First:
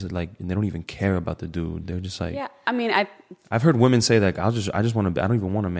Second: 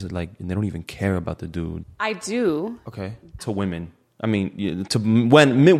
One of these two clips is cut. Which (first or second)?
second